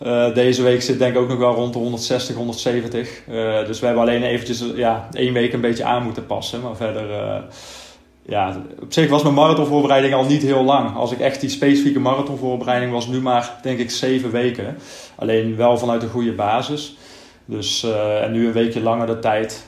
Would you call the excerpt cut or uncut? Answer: uncut